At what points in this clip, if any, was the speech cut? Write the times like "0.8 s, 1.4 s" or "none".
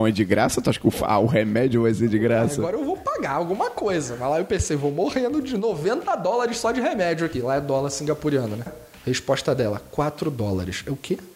8.7 s